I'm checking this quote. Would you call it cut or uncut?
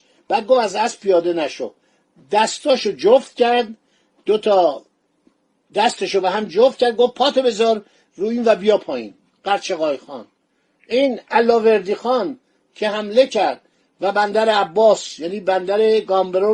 uncut